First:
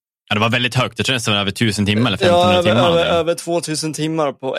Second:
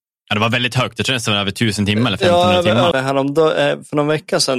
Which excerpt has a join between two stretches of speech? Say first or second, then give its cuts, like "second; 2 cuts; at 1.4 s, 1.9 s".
second; 1 cut; at 2.9 s